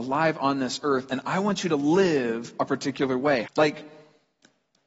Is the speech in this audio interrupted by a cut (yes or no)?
yes